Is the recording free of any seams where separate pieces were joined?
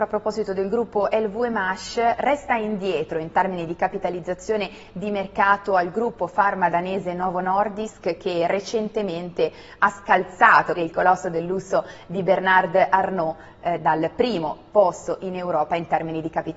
no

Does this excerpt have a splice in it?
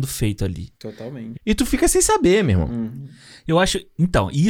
yes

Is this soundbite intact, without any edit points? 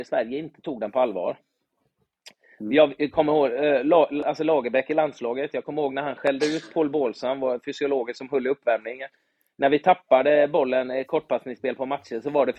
yes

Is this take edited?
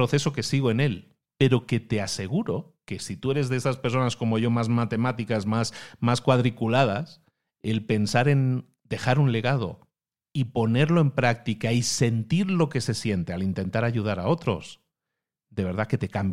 no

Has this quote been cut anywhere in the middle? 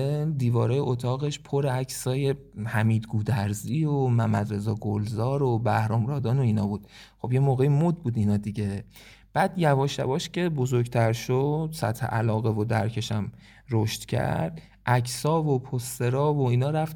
no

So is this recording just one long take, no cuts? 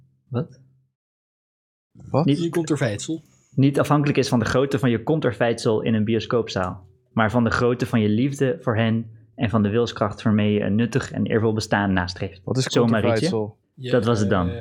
yes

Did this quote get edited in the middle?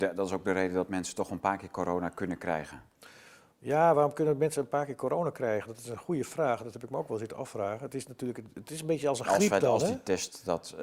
no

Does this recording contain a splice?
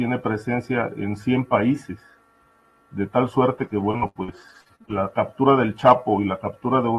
no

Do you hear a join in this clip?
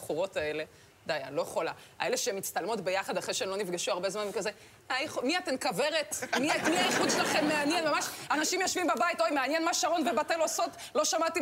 yes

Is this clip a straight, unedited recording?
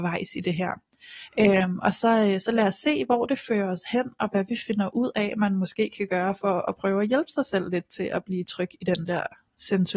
yes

